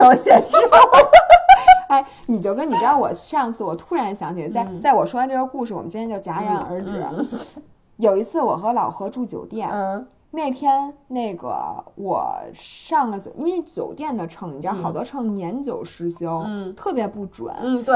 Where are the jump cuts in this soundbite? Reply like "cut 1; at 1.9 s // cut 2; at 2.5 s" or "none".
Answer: none